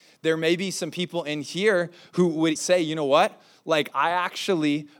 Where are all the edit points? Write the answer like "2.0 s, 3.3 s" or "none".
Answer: 2.6 s, 3.9 s